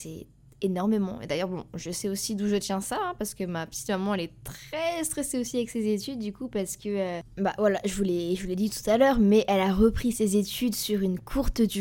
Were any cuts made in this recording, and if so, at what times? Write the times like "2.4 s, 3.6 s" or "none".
none